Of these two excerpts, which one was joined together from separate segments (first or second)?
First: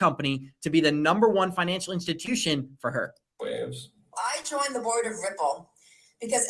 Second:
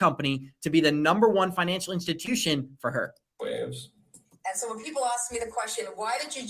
first